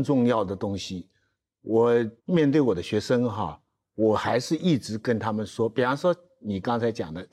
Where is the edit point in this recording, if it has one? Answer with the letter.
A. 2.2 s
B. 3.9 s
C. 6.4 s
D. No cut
A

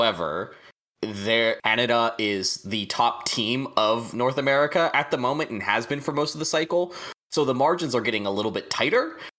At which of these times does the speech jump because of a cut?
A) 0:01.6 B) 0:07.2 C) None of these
A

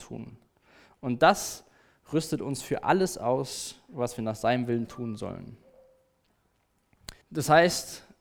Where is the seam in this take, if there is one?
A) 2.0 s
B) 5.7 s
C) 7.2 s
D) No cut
C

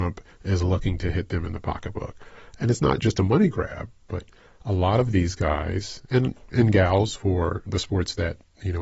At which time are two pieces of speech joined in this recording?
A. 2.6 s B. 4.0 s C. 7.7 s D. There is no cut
C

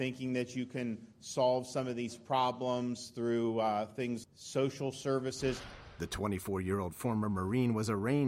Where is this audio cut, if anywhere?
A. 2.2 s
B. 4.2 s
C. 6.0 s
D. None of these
B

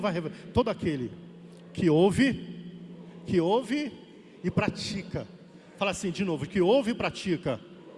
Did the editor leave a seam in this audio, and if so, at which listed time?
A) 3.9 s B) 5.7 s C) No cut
C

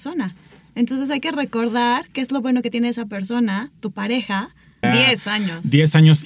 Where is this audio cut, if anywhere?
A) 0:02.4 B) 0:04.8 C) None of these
B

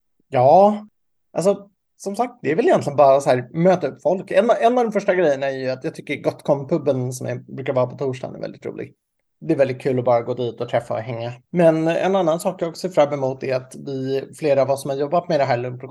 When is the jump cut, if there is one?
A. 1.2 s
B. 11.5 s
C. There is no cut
C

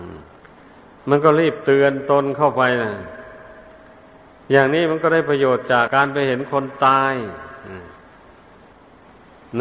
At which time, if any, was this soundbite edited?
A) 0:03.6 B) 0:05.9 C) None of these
B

